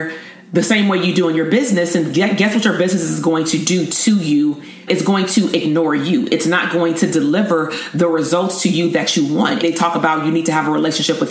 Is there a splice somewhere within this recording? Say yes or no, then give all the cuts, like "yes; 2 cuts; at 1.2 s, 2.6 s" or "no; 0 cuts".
yes; 2 cuts; at 4.9 s, 9.6 s